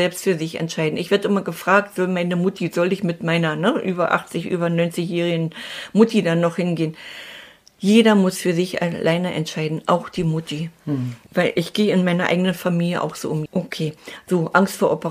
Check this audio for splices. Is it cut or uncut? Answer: cut